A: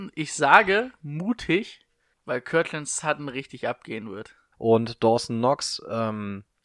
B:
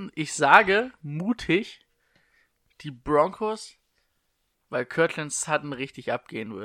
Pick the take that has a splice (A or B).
A